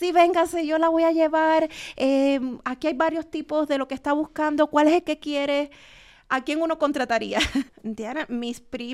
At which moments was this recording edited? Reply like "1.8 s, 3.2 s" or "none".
7.7 s